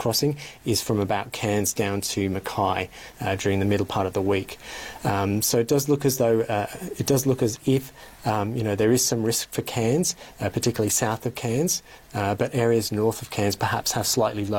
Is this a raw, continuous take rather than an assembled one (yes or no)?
no